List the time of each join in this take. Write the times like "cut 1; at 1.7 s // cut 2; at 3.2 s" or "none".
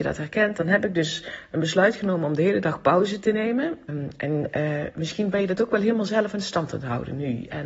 cut 1; at 3.9 s